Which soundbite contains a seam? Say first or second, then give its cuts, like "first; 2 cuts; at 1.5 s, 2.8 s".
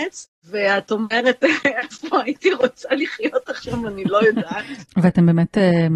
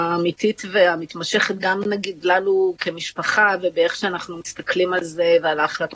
first; 1 cut; at 4.8 s